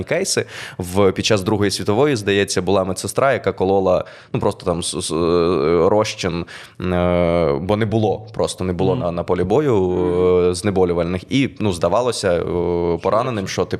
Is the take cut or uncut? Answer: uncut